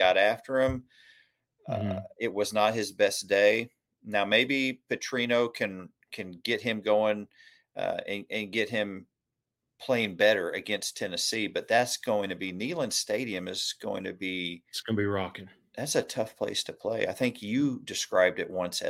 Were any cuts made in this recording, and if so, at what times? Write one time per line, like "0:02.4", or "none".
none

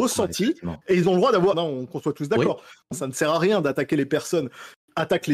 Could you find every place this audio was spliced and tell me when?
0:01.5
0:02.9

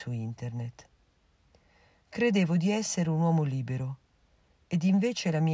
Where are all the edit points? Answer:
none

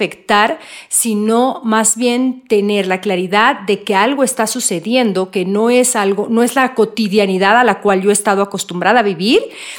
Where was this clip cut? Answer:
none

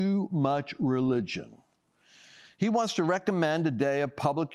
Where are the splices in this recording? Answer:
none

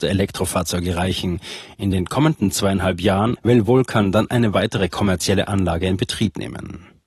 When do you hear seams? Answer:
0:03.4

